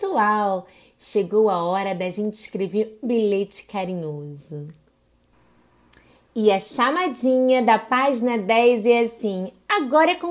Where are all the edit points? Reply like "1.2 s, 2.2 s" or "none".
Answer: 3.0 s